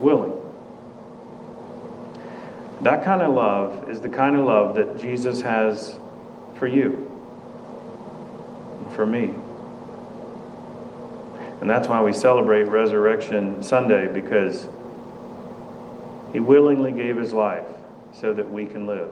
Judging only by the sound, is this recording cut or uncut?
uncut